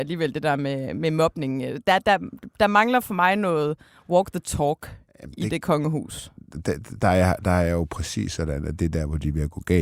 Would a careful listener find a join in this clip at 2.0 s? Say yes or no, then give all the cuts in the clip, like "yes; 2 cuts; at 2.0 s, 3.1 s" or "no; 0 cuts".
no; 0 cuts